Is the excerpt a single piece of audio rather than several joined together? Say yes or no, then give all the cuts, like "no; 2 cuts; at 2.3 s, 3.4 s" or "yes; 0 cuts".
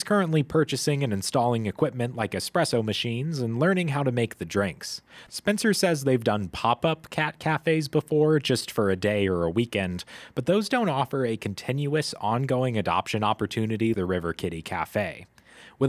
no; 2 cuts; at 5.3 s, 13.9 s